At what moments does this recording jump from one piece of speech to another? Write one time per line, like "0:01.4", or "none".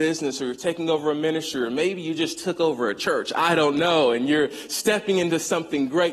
none